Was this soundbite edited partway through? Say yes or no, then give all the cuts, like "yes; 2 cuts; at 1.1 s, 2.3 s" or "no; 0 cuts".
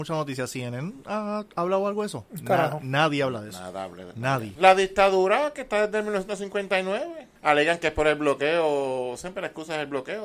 yes; 2 cuts; at 4.5 s, 7.4 s